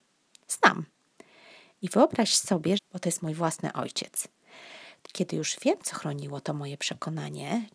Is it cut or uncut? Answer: cut